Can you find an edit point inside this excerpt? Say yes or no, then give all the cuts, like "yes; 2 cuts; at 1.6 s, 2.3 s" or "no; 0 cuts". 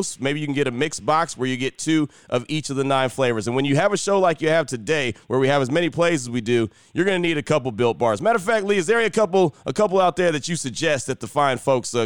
no; 0 cuts